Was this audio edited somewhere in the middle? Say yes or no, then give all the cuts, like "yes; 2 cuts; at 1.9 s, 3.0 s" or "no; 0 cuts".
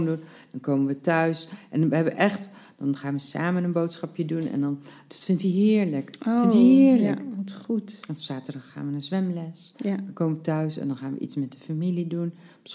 no; 0 cuts